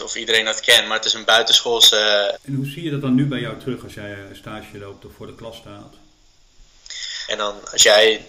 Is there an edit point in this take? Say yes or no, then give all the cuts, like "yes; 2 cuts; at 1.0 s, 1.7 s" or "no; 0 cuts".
yes; 2 cuts; at 2.4 s, 7.3 s